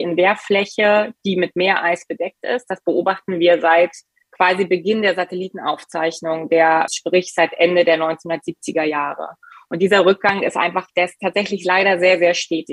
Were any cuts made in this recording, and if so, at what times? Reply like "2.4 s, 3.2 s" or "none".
6.9 s